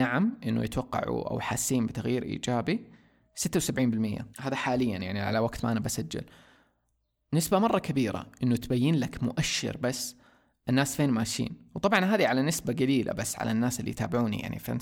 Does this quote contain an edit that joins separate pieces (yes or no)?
yes